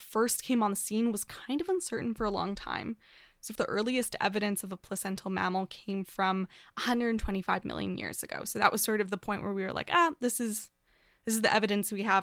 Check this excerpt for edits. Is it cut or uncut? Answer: cut